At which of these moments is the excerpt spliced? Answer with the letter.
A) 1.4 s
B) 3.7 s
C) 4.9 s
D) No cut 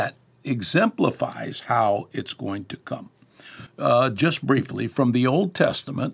B